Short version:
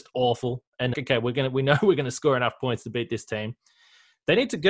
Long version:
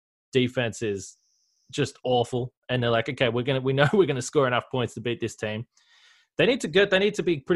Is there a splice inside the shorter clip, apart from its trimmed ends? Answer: yes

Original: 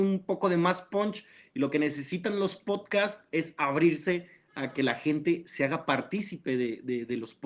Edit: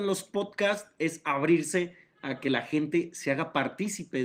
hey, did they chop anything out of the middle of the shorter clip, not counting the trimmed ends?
no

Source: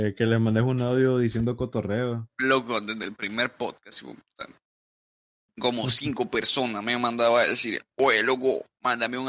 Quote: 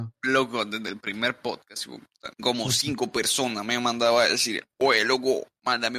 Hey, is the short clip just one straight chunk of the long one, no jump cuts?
no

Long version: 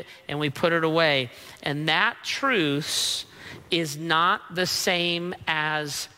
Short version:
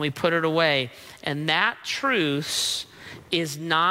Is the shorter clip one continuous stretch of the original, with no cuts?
yes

